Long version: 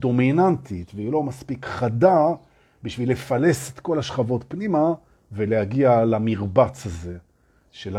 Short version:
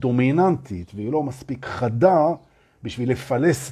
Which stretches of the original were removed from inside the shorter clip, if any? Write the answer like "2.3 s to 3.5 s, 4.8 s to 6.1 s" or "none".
none